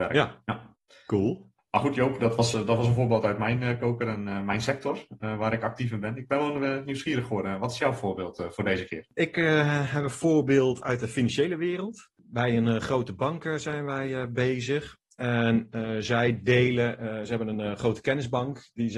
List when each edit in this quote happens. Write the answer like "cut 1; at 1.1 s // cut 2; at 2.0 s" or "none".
none

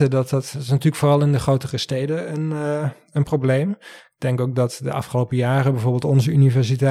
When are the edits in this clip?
none

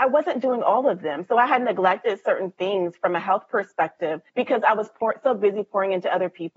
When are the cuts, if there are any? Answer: cut 1; at 4.3 s

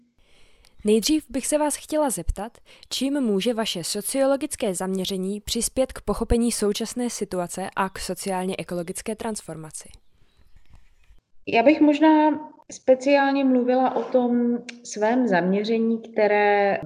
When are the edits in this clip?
none

